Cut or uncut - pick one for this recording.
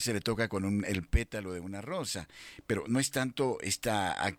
cut